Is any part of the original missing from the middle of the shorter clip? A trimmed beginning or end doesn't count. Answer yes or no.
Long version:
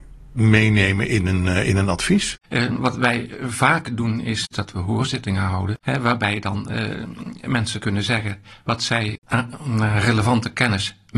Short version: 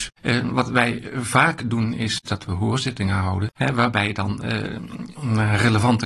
yes